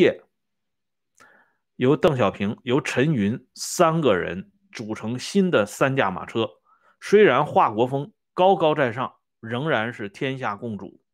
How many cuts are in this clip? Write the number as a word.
zero